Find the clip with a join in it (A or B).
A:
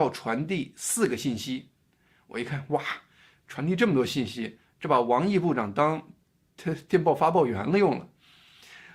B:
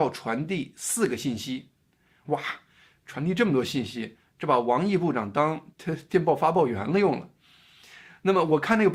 B